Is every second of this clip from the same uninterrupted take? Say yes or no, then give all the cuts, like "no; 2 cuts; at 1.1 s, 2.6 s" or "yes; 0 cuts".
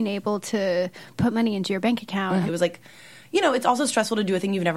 no; 1 cut; at 2.5 s